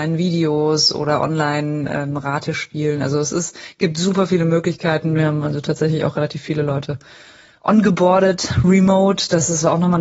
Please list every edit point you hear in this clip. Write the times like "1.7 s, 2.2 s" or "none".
5.2 s